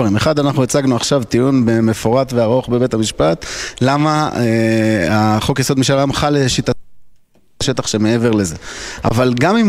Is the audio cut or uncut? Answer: uncut